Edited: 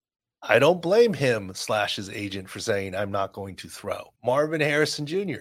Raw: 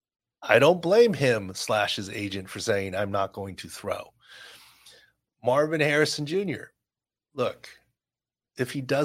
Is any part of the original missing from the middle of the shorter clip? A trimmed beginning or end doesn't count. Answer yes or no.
yes